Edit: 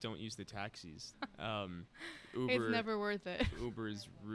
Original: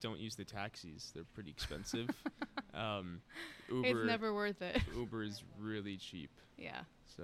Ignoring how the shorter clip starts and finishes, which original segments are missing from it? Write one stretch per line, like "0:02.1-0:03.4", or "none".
0:01.1-0:02.5